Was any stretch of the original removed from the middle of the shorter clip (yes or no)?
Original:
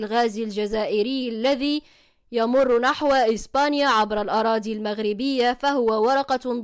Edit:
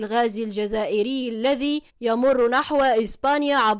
yes